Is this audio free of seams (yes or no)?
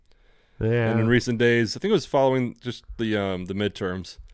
yes